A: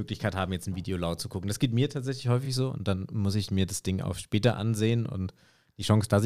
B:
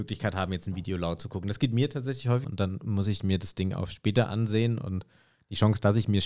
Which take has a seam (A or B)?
B